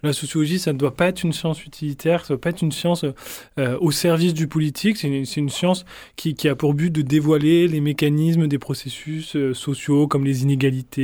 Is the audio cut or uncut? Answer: uncut